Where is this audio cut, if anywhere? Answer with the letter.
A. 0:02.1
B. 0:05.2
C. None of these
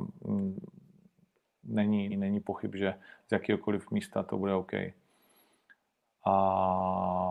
A